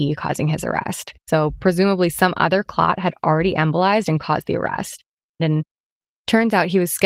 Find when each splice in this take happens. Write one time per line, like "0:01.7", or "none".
0:01.3
0:05.4